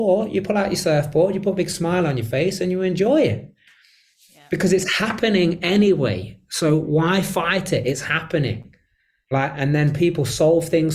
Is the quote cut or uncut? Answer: uncut